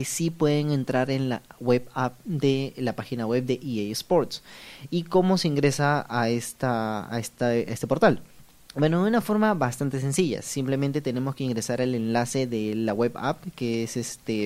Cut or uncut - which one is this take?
uncut